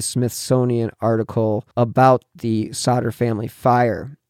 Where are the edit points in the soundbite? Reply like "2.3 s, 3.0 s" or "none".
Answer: 1.7 s